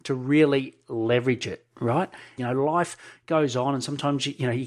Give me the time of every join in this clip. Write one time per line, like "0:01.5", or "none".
0:02.4

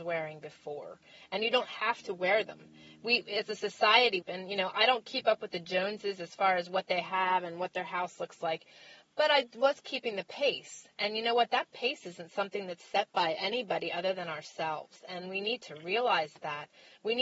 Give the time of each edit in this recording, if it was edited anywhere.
0:04.2

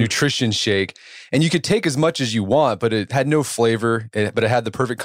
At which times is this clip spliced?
none

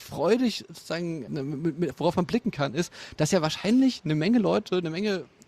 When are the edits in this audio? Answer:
0:01.9

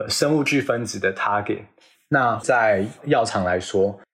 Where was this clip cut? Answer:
0:01.9

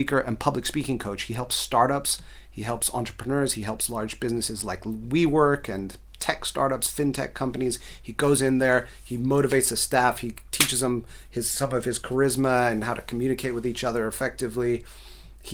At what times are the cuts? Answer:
none

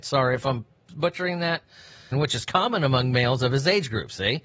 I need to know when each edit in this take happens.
0:02.1

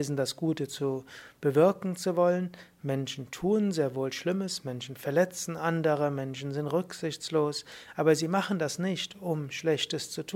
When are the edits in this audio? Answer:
none

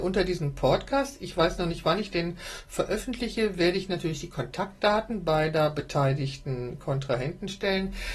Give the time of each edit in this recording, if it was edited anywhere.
none

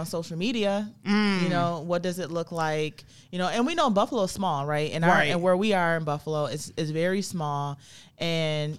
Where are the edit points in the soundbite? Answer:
none

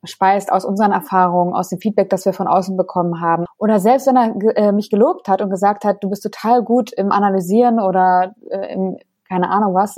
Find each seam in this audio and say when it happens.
0:03.5

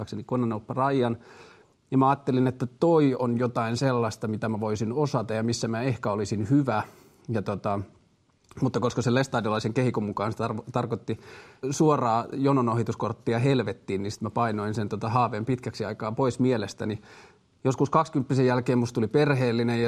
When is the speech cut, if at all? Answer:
0:11.6

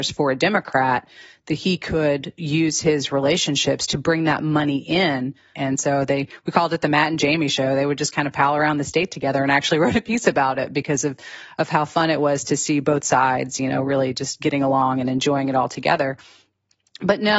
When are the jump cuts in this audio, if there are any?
0:05.5

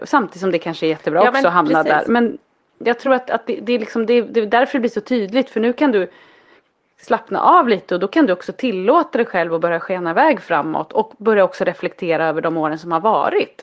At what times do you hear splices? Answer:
none

